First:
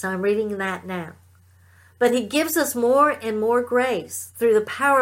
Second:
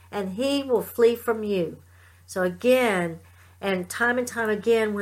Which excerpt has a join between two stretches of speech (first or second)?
second